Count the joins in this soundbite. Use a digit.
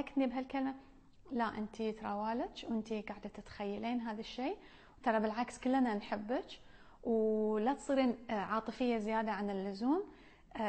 0